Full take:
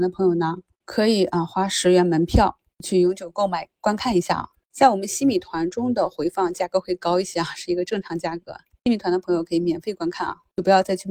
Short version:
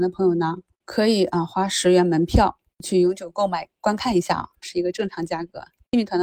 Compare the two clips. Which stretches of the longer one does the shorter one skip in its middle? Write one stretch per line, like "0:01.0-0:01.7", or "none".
0:04.6-0:07.5